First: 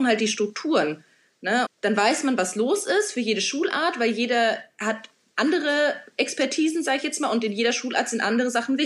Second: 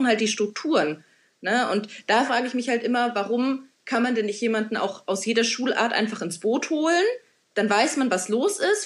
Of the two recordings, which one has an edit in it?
first; 1 cut; at 1.7 s

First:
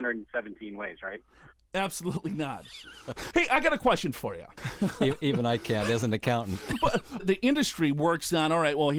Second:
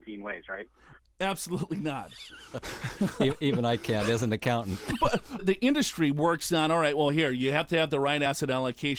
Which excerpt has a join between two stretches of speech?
first; 2 cuts; at 3.3 s, 4.6 s

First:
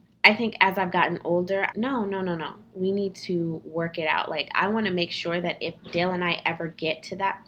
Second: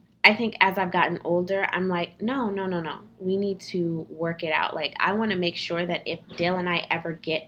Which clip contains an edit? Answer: first; 1 cut; at 1.7 s

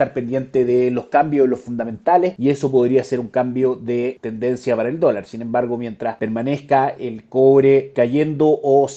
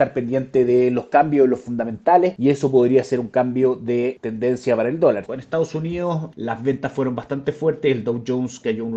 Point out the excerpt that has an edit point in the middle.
second; 2 cuts; at 5.3 s, 6.3 s

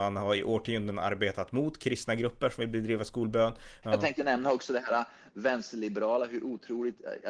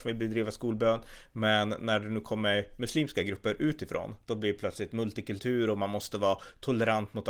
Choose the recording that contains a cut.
first; 1 cut; at 3.8 s

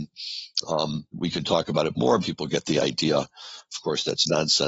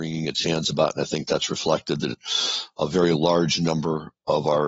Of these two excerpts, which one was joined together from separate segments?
first; 3 cuts; at 1.1 s, 2.2 s, 3.7 s

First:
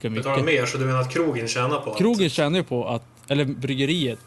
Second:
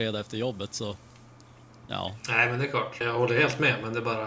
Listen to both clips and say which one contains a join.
second; 1 cut; at 3.0 s

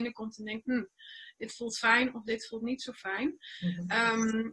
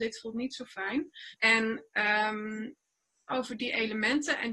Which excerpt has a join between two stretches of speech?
second; 2 cuts; at 1.3 s, 3.3 s

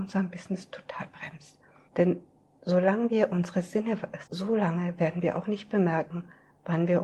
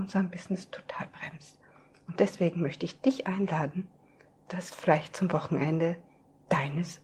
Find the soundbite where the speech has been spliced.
first; 2 cuts; at 1.9 s, 4.3 s

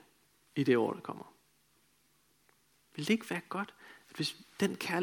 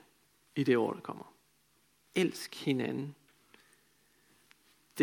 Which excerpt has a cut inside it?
second; 1 cut; at 2.0 s

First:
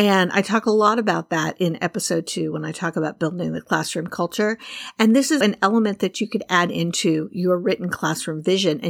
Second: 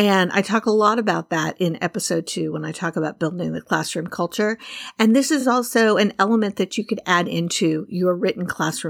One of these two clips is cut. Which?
first; 1 cut; at 5.4 s

